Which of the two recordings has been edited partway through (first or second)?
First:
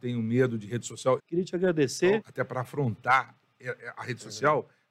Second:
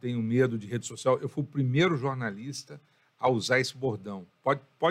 first